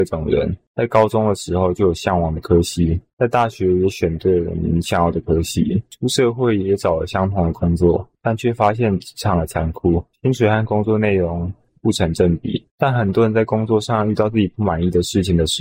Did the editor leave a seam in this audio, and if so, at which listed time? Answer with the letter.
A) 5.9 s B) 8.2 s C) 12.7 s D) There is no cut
D